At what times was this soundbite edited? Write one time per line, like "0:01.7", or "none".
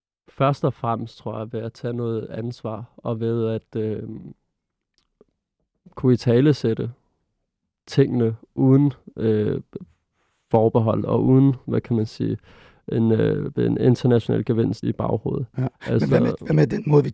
0:14.8